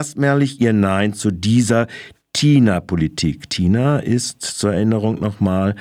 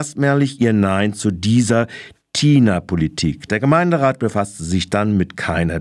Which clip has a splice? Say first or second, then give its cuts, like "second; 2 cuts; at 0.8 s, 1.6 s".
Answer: second; 1 cut; at 3.5 s